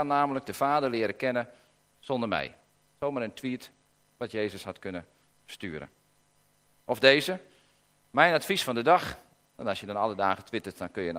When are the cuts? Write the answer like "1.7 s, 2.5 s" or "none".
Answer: none